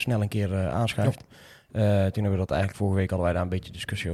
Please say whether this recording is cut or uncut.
uncut